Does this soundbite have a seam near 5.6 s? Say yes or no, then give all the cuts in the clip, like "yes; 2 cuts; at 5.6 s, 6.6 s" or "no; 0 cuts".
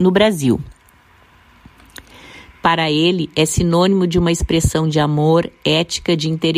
no; 1 cut; at 2.5 s